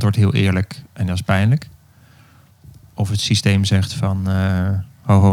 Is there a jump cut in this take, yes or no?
no